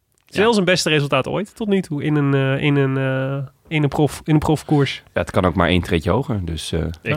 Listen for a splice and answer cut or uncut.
uncut